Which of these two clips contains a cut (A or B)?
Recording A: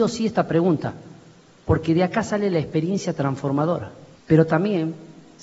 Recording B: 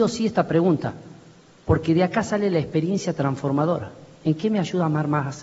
A